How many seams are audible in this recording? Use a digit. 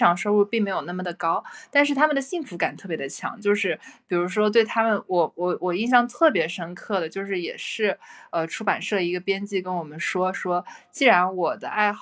0